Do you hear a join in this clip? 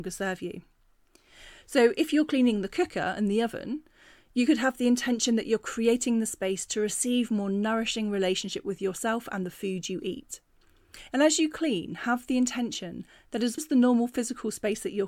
yes; 2 cuts; at 11.1 s, 13.6 s

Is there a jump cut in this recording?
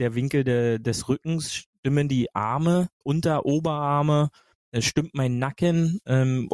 yes; 1 cut; at 3.0 s

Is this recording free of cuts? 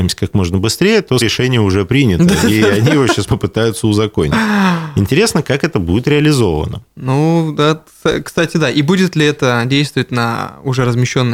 no; 2 cuts; at 1.2 s, 3.3 s

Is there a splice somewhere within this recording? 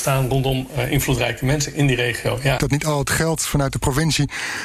yes; 1 cut; at 2.6 s

